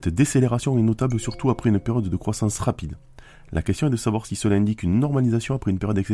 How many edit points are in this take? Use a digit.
0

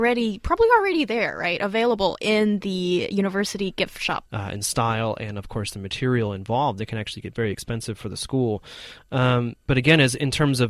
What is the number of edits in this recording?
1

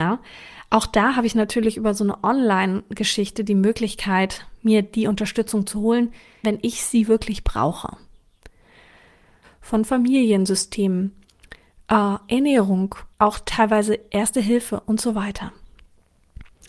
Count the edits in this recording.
3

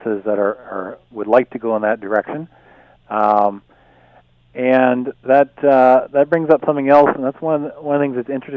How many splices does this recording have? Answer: 0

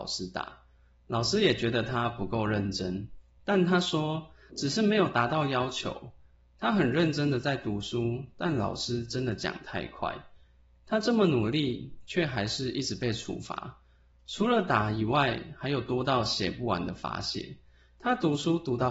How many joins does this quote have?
1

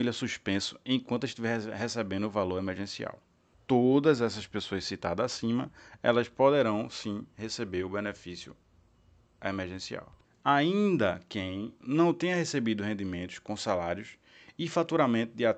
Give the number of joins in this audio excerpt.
3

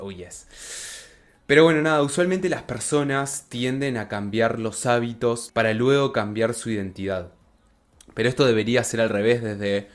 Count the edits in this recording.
1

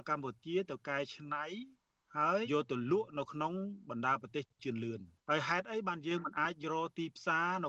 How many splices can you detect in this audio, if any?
2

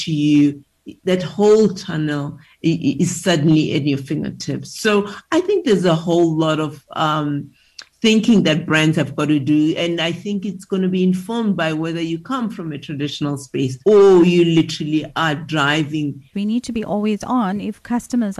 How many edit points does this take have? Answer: 2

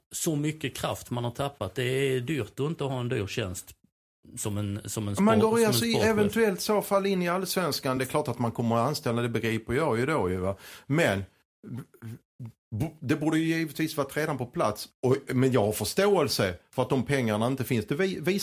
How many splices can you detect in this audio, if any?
0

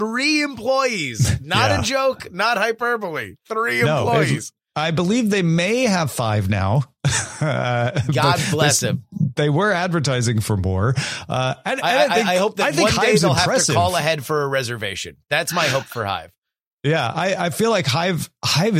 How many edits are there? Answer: 0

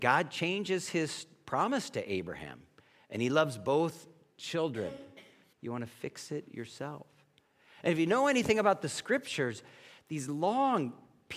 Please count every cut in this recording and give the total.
2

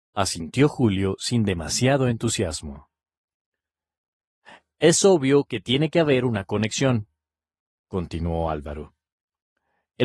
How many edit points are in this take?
0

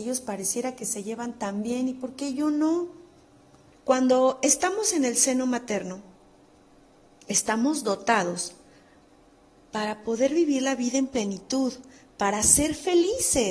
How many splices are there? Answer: 1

